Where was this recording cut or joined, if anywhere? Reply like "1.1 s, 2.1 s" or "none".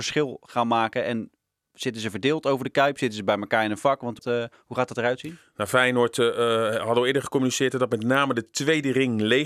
4.2 s

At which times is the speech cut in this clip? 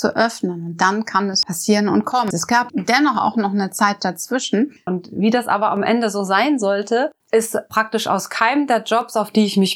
2.3 s, 4.9 s, 7.2 s

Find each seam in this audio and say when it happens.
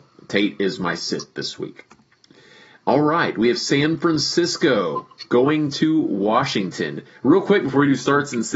none

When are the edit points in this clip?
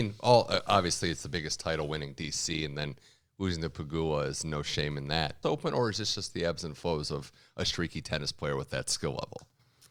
5.4 s

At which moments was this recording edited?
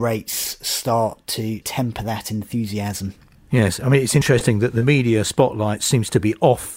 none

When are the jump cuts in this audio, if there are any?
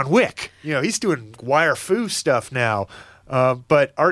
1.4 s

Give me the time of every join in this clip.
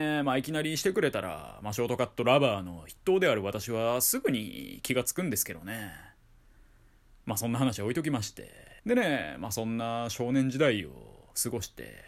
8.8 s

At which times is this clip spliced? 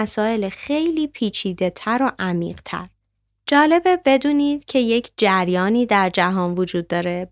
3.4 s

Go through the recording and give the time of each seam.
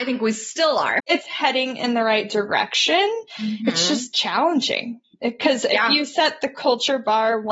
1.0 s

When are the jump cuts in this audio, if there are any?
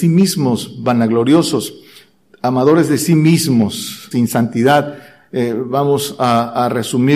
4.1 s

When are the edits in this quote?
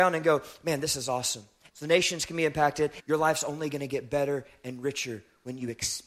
1.7 s, 3.0 s

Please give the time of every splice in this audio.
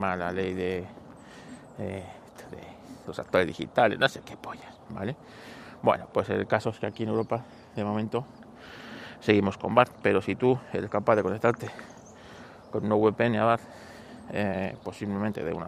none

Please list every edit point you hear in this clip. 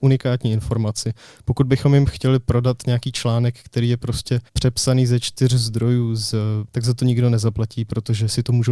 4.5 s, 6.7 s

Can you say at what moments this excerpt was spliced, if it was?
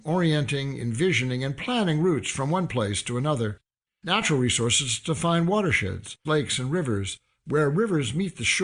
3.9 s, 6.3 s

